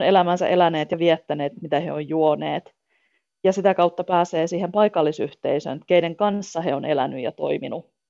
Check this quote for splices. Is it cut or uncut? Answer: cut